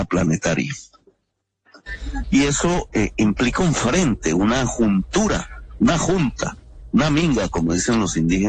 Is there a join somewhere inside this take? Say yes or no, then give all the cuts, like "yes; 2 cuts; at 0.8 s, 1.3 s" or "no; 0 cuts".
yes; 1 cut; at 2.2 s